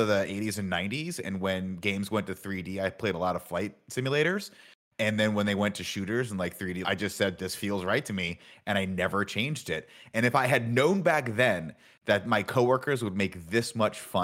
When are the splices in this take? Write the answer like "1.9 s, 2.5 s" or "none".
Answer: 6.8 s